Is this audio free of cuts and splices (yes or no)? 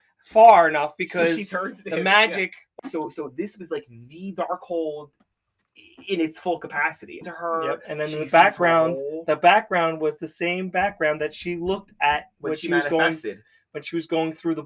no